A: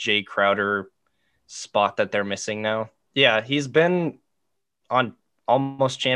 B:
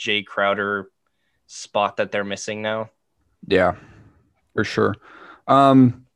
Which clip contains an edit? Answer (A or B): A